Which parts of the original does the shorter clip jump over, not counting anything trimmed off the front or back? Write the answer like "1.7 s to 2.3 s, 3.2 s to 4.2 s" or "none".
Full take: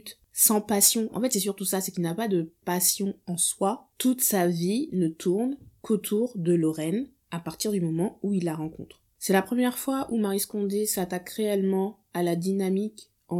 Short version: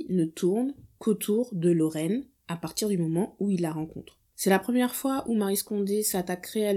none